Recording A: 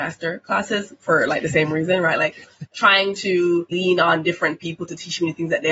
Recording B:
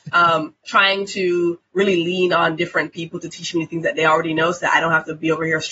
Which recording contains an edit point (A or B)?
A